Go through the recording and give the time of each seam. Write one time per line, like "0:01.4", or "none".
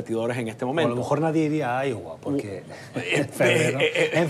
none